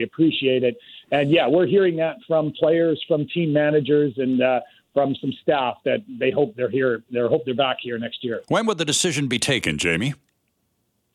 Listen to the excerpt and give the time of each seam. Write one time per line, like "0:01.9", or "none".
none